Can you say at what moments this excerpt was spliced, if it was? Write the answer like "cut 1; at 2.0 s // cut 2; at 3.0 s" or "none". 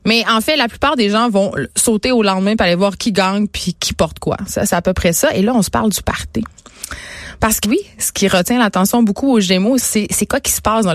cut 1; at 7.6 s // cut 2; at 9.8 s